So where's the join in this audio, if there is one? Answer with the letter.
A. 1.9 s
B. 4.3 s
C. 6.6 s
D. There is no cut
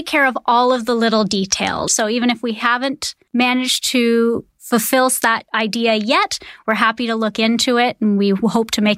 A